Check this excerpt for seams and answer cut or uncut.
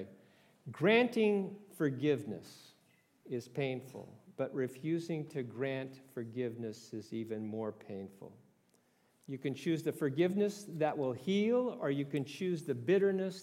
cut